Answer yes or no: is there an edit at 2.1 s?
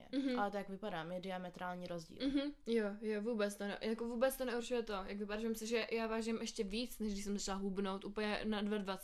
no